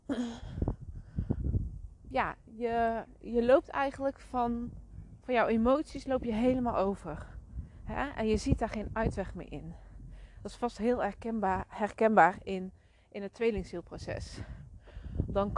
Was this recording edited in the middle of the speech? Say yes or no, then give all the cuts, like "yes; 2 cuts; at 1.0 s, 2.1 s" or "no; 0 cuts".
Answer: no; 0 cuts